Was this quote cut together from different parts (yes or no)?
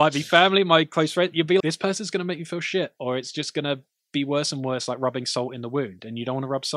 yes